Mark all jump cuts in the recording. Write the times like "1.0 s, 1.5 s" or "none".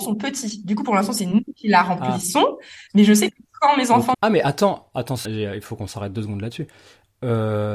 4.1 s, 5.2 s